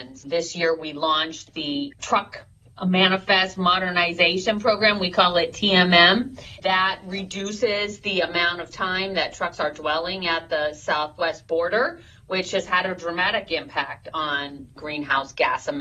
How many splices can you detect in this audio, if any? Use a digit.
0